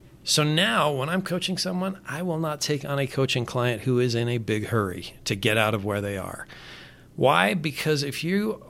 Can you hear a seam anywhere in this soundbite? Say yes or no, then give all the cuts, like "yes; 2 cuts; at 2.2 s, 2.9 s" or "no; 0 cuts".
no; 0 cuts